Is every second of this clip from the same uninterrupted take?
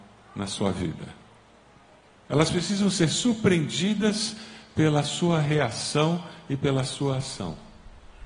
yes; 0 cuts

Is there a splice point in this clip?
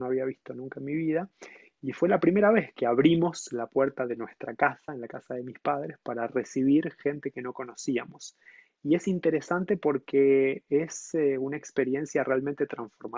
no; 0 cuts

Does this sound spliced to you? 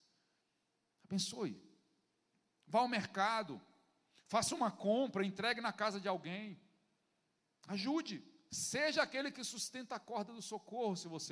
no; 0 cuts

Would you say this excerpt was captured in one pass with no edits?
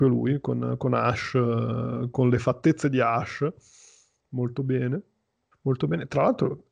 no; 1 cut; at 5.5 s

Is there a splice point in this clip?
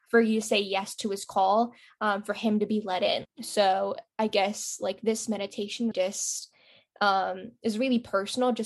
yes; 2 cuts; at 3.3 s, 5.9 s

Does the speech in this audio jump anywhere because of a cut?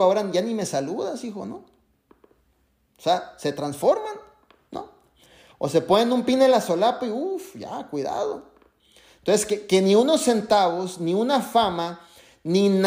no; 0 cuts

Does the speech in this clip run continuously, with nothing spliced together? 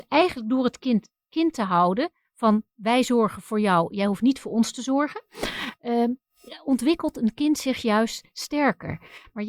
yes; 0 cuts

